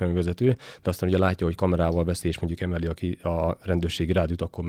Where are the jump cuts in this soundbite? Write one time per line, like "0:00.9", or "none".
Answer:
none